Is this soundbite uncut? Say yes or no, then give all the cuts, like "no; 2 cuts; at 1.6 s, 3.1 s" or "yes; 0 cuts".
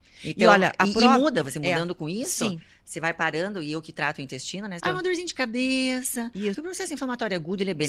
no; 2 cuts; at 4.8 s, 6.5 s